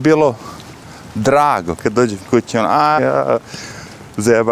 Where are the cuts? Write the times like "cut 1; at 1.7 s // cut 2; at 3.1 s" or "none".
cut 1; at 1.8 s // cut 2; at 3.0 s

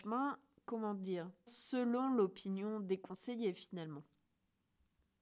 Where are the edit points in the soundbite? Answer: cut 1; at 1.5 s

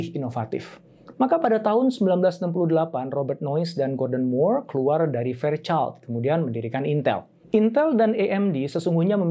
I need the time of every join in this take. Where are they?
cut 1; at 1.1 s // cut 2; at 7.4 s

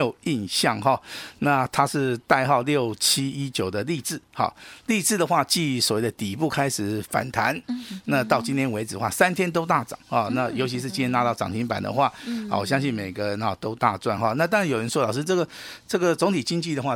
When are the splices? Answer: none

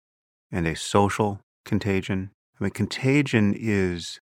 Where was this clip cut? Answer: cut 1; at 2.4 s

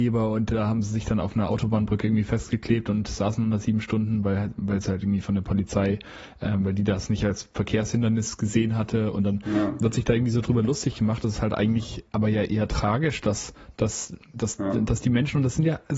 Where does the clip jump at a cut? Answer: none

